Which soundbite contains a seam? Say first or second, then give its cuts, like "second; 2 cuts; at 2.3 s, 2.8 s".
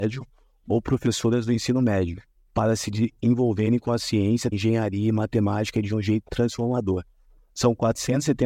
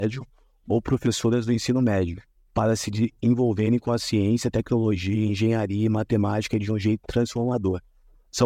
first; 1 cut; at 4.5 s